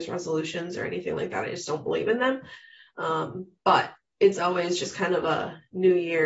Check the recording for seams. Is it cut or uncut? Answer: uncut